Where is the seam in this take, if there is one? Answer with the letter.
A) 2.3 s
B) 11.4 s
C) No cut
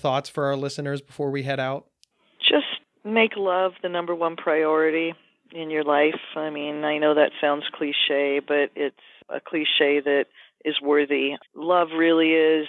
B